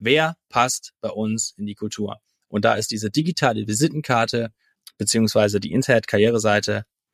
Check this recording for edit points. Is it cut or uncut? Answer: uncut